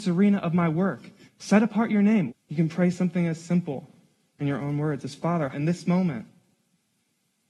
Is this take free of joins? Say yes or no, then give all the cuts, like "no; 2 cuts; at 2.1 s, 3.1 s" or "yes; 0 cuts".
no; 3 cuts; at 1.3 s, 2.3 s, 5.5 s